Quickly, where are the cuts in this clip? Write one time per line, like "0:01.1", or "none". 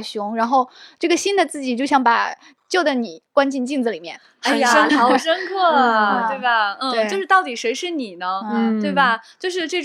0:04.9